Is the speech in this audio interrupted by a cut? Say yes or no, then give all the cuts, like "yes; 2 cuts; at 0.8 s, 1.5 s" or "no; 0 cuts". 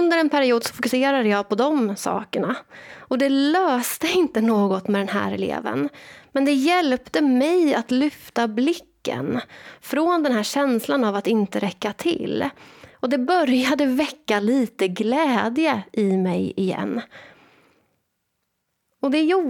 no; 0 cuts